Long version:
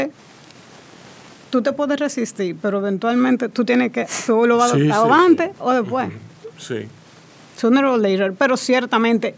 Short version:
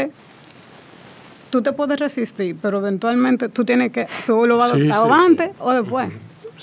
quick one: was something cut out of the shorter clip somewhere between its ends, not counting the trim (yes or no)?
no